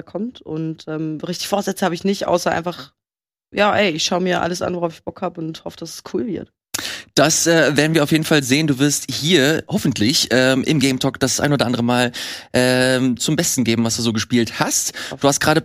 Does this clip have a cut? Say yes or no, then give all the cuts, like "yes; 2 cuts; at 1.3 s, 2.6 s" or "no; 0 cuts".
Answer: no; 0 cuts